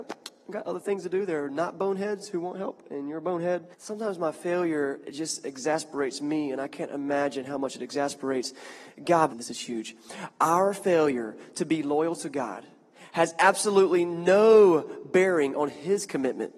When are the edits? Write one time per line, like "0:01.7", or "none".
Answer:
0:03.7
0:05.0
0:09.3